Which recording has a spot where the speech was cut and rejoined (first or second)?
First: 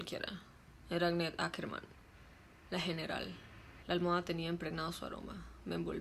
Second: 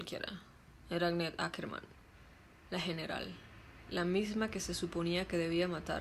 first